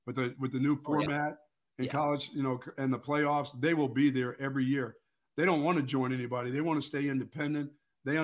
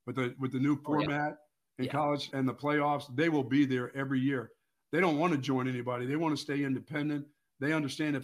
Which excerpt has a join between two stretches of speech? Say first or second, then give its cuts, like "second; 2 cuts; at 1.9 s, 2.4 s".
second; 1 cut; at 2.3 s